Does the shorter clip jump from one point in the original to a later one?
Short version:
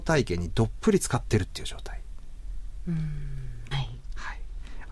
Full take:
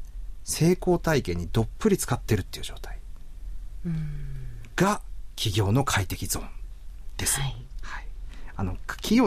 yes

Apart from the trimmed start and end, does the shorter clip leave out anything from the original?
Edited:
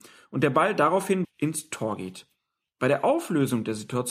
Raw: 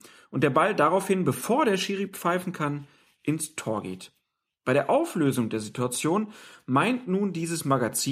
yes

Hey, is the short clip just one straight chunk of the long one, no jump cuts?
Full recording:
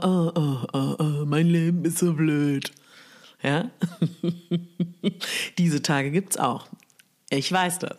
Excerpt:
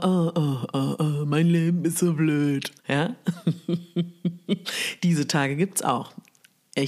no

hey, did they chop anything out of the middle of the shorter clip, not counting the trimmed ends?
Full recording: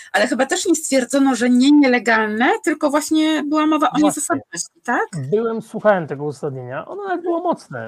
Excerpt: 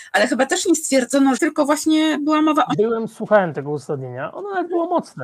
yes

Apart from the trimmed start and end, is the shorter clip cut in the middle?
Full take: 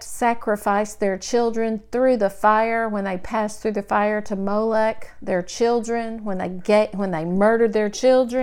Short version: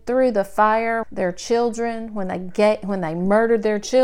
yes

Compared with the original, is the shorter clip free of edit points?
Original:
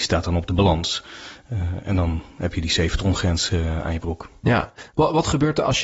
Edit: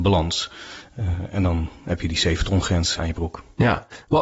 no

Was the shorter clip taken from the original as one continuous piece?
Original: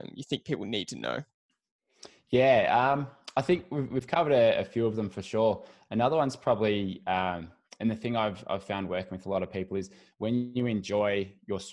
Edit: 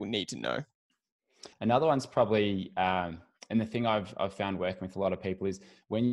no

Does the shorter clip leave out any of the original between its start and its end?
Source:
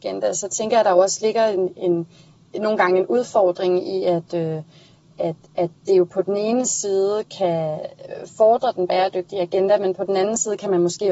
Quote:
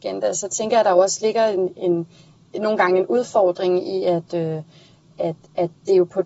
no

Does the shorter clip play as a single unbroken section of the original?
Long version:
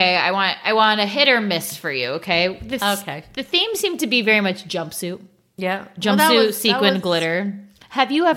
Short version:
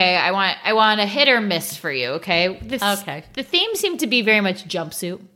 yes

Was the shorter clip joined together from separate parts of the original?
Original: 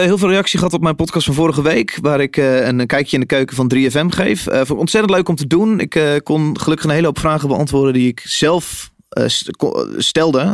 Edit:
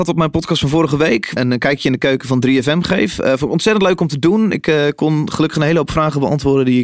yes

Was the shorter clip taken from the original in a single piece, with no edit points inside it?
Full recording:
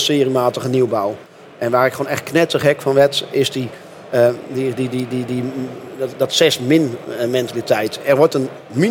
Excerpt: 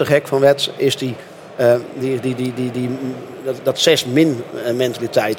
yes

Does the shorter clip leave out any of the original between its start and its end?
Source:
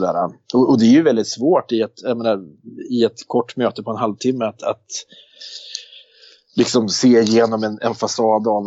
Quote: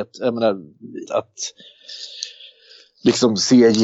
yes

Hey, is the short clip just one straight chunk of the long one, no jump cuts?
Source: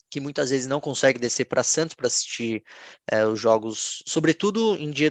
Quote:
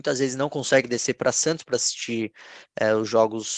yes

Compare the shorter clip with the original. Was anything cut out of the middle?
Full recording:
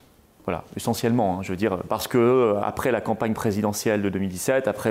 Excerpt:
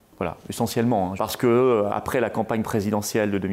yes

